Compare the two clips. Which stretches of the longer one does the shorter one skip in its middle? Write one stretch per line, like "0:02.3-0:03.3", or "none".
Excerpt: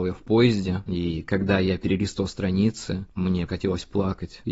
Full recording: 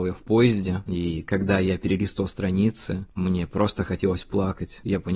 0:03.5-0:03.9